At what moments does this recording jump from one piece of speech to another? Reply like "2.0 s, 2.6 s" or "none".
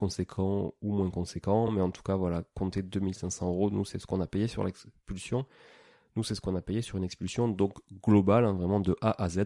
none